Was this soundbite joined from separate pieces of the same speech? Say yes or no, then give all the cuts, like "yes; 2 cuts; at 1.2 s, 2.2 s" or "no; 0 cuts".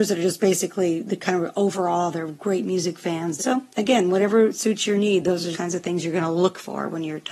yes; 2 cuts; at 3.4 s, 5.5 s